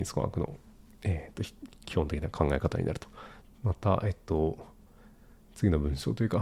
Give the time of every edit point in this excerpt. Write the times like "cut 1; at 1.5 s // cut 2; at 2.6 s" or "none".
cut 1; at 3.4 s